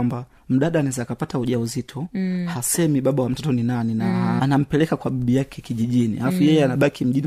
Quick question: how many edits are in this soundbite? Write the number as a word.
one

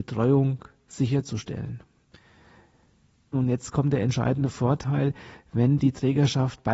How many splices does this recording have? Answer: one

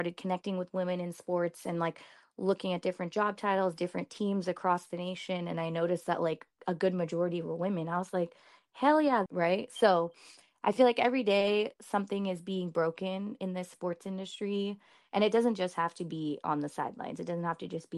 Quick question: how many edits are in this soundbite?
one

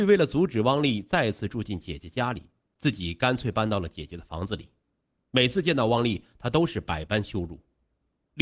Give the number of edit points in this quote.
zero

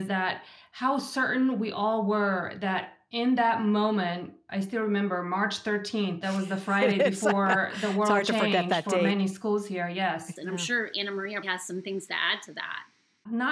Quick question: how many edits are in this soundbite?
two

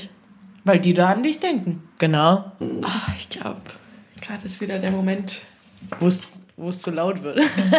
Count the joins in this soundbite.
one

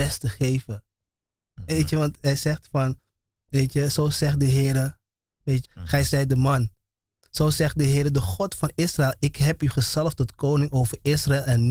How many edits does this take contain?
one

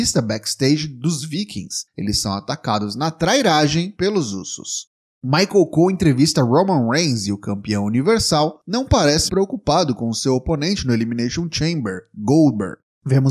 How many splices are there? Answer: one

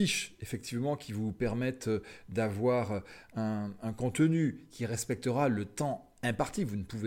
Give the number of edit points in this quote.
zero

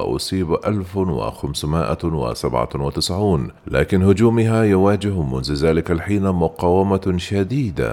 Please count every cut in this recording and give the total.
one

